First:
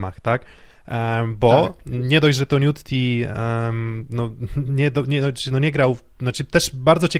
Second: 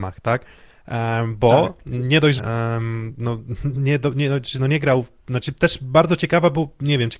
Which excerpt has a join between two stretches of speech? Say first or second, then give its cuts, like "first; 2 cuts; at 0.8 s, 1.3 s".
second; 1 cut; at 2.4 s